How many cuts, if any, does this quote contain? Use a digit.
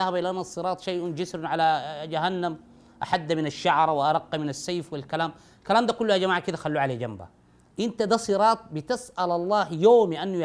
1